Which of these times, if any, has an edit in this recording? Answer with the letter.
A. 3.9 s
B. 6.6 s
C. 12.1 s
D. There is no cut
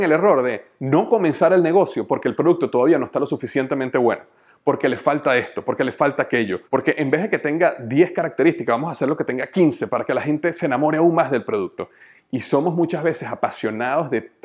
B